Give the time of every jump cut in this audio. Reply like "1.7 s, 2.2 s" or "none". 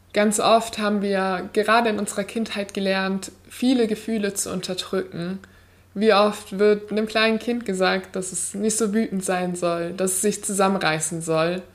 none